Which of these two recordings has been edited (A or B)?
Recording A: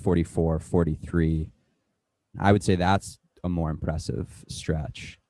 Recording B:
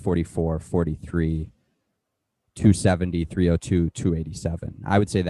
A